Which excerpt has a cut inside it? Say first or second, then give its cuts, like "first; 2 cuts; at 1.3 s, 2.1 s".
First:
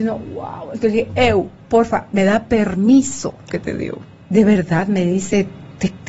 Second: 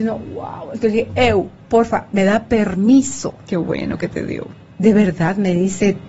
first; 1 cut; at 3.5 s